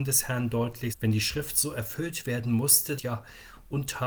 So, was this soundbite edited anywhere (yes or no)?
yes